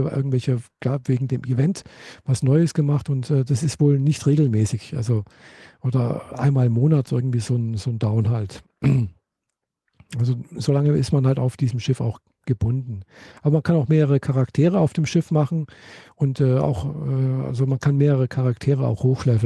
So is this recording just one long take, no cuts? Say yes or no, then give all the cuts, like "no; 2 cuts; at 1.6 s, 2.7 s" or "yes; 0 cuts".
yes; 0 cuts